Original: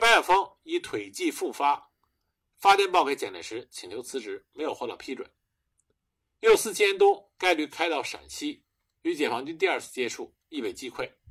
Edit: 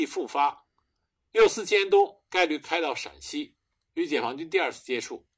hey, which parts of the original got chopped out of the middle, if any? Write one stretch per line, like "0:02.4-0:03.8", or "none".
0:02.4-0:06.3